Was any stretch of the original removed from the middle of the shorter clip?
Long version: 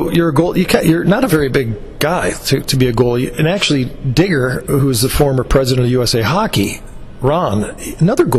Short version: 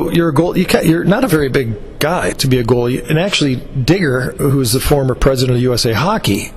yes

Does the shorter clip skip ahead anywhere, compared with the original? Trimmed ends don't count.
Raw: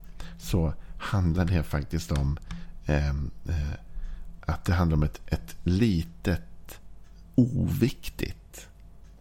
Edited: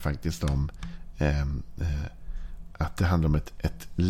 no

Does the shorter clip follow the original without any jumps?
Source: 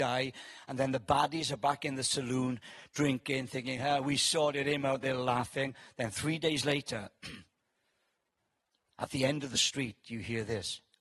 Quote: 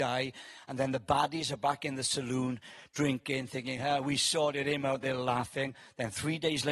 yes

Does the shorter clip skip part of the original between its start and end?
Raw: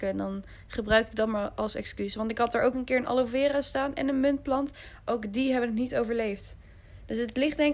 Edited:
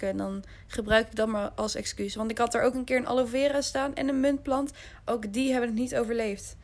no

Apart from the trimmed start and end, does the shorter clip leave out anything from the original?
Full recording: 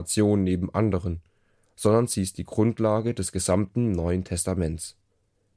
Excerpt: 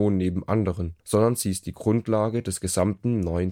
yes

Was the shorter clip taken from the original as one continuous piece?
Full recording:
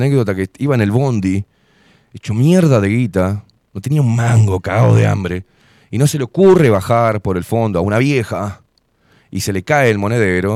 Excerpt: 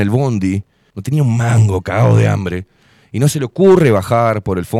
no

